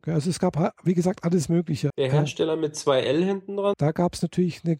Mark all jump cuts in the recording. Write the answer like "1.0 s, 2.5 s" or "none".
1.9 s, 3.7 s

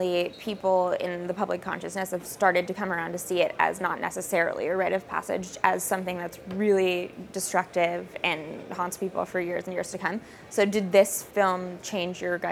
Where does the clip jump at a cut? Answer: 11.3 s

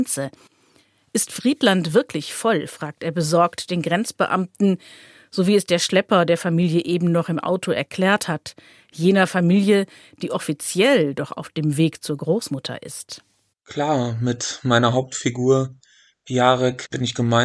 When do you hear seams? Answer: none

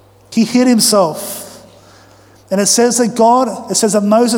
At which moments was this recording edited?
none

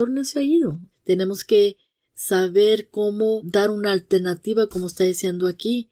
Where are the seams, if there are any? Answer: 0.9 s, 3.4 s

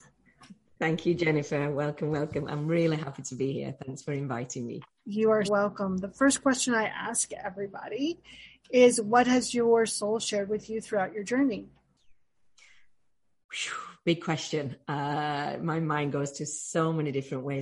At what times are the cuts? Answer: 5.5 s

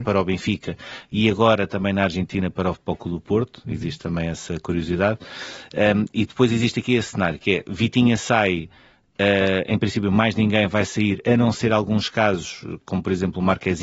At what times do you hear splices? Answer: none

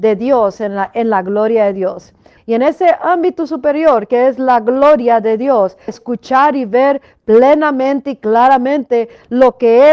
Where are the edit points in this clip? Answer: 2.4 s, 5.9 s

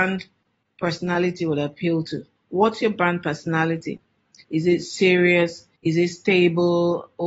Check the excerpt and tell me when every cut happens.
4.4 s, 5.8 s

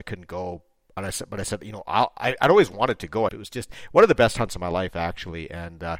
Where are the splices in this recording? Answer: 3.3 s

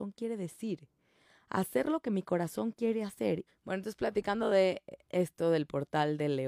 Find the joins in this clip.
3.5 s

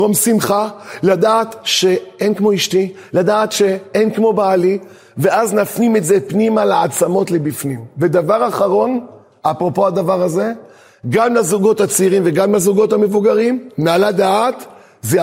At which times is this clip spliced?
none

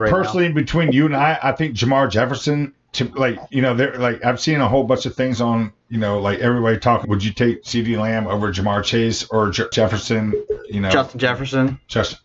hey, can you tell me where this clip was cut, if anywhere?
7.0 s, 9.7 s

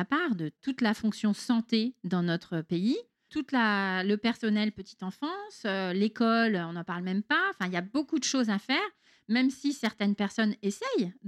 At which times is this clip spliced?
3.3 s

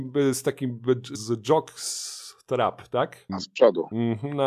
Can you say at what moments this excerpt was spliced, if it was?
1.1 s, 3.3 s

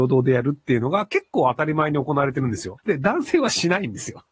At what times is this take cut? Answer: 2.8 s

